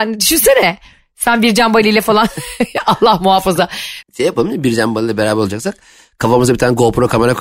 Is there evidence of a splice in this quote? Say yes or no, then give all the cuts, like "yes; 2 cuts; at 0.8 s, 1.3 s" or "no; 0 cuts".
yes; 1 cut; at 4.0 s